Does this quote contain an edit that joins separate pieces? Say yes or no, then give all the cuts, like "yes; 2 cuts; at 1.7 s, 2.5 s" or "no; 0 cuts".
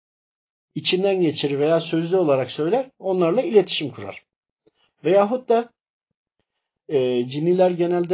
yes; 1 cut; at 4.8 s